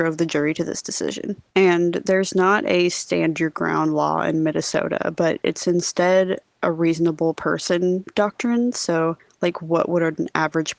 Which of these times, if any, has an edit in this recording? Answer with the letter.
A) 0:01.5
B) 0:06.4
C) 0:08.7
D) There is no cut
A